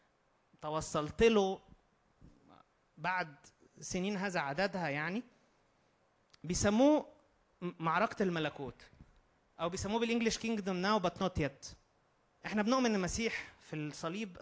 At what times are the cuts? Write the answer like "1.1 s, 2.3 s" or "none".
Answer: none